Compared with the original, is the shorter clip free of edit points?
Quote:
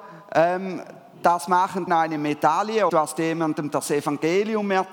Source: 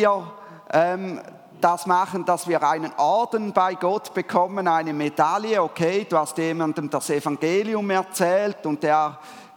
no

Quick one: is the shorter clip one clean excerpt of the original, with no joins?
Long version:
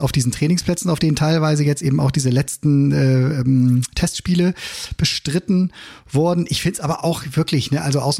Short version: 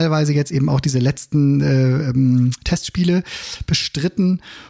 yes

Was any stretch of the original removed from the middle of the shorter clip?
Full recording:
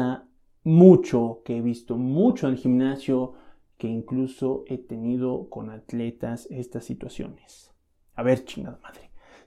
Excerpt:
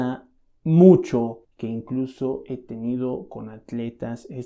yes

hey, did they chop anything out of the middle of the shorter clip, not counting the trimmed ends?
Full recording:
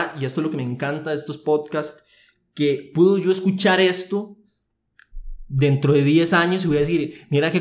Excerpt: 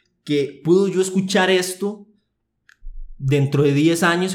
no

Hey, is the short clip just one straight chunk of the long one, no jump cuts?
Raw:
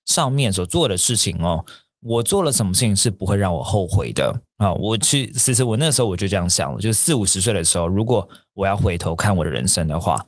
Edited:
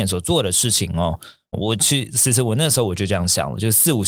no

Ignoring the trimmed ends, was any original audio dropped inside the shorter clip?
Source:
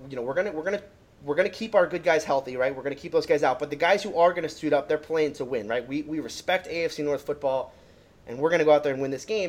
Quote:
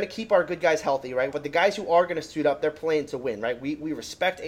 yes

